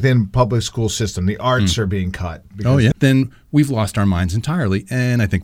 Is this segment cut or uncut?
cut